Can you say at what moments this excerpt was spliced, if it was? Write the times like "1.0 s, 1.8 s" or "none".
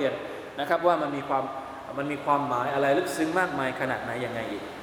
none